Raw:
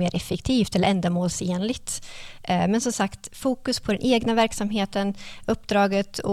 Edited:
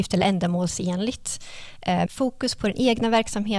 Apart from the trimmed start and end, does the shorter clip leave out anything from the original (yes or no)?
yes